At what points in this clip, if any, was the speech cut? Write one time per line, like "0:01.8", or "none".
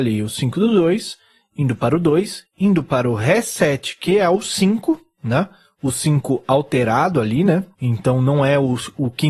0:07.7